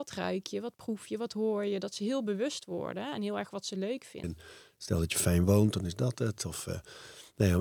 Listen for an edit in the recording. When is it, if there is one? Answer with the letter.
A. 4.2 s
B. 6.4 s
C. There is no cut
A